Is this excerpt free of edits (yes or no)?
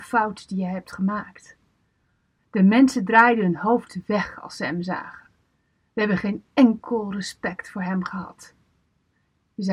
no